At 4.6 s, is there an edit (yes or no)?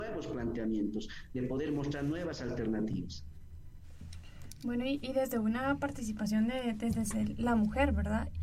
no